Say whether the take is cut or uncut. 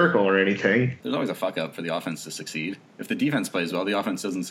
cut